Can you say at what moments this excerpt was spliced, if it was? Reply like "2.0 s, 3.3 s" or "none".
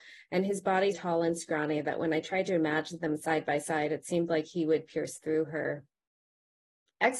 0.9 s

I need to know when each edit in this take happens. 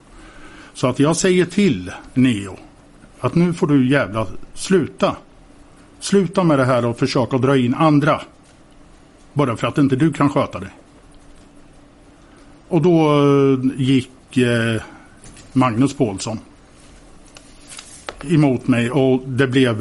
15.5 s

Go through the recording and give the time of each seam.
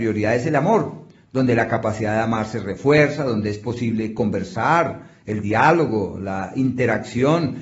none

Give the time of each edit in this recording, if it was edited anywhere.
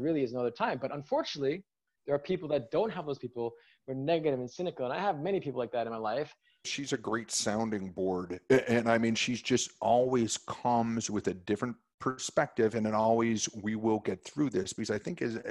6.6 s

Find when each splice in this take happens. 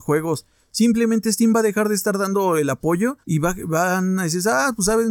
3.2 s

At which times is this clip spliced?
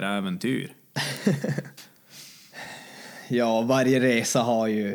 1.8 s

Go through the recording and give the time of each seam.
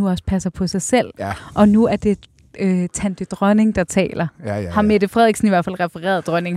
none

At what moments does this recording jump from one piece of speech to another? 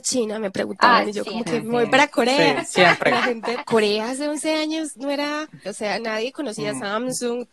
3.6 s, 5.7 s

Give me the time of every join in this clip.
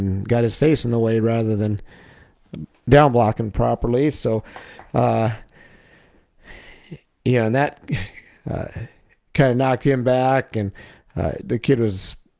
11.4 s

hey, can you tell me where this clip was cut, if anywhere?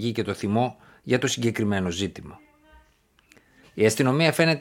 3.6 s

